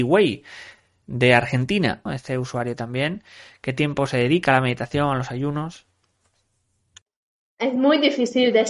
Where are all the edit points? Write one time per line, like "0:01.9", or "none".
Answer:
0:02.1